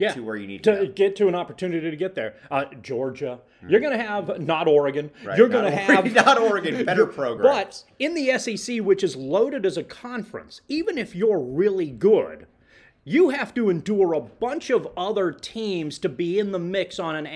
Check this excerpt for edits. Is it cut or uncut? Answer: uncut